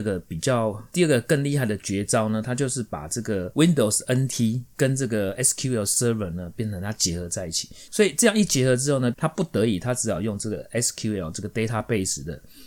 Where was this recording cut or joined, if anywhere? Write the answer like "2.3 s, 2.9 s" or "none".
7.9 s, 9.1 s